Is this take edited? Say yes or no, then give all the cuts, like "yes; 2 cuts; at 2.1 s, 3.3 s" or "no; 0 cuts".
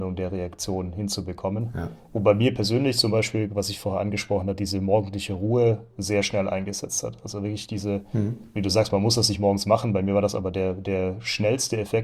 no; 0 cuts